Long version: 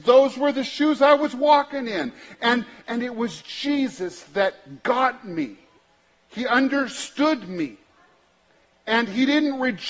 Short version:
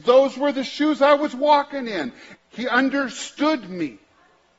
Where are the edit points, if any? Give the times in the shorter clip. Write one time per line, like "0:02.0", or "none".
0:02.4

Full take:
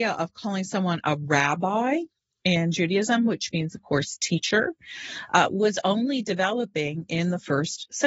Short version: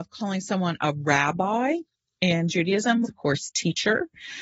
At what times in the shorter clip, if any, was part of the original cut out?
0:03.0

